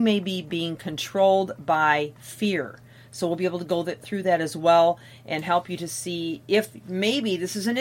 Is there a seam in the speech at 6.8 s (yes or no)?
no